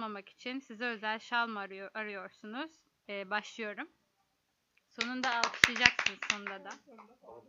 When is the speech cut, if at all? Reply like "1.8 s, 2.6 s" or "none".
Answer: 3.0 s